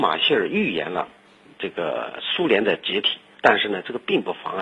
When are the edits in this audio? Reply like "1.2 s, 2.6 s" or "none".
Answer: 3.4 s

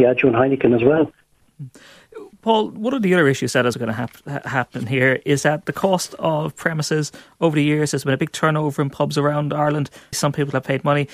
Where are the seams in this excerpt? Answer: 2.3 s, 3.7 s, 10.1 s

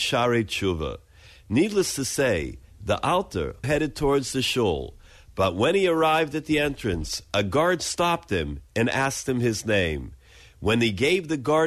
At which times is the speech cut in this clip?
3.6 s

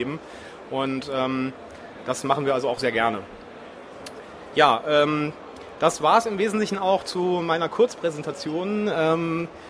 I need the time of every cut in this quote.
none

